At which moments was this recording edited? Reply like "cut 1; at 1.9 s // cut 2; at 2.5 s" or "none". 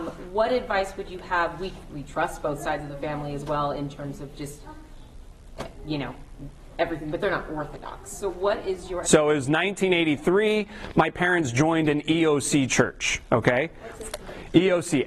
cut 1; at 9.0 s